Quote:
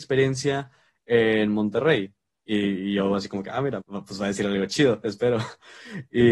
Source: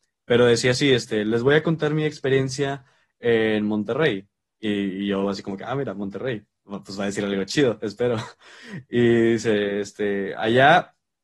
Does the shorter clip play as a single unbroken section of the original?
no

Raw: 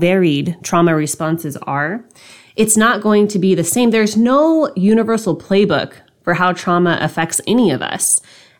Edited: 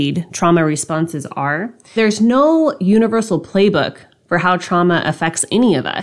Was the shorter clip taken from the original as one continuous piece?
no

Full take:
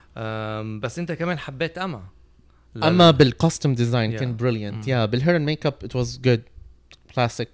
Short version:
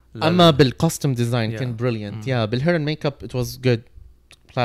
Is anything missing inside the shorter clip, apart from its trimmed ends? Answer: no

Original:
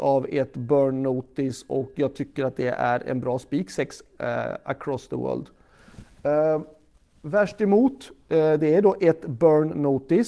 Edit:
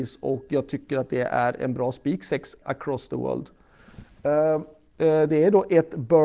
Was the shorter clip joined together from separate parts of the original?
yes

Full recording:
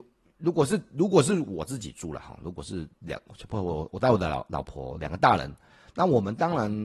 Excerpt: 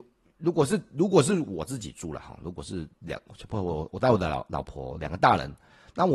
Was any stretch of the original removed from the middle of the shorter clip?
no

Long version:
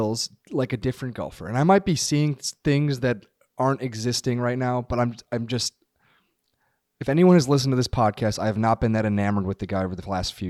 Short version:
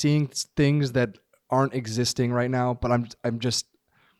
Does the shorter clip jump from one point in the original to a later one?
no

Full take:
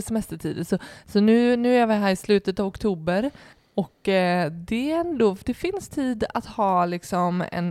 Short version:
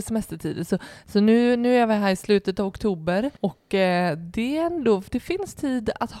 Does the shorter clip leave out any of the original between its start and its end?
yes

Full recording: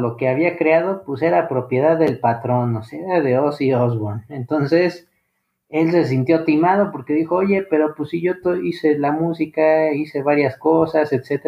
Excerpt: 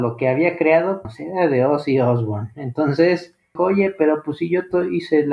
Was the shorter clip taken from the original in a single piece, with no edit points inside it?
no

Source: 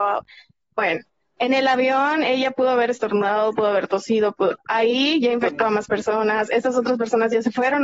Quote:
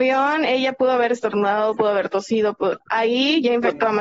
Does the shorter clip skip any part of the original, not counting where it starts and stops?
no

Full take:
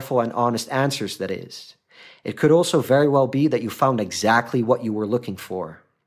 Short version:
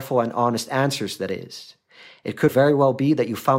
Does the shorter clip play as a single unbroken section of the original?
no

